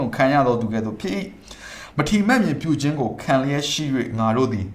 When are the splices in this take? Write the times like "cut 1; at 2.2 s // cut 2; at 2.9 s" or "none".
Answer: none